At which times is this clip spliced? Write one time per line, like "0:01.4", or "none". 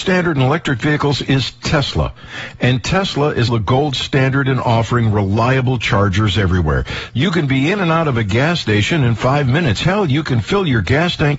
0:03.5
0:07.1